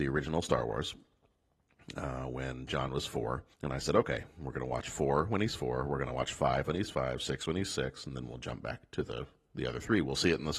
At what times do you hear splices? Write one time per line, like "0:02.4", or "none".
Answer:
0:03.5